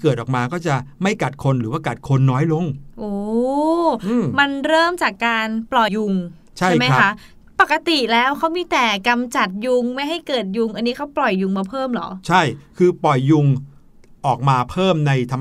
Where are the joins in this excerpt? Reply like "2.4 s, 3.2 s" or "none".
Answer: 5.9 s